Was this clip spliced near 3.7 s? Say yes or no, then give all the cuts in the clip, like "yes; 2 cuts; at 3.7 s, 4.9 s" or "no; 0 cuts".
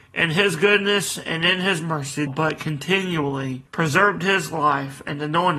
yes; 2 cuts; at 2.3 s, 3.7 s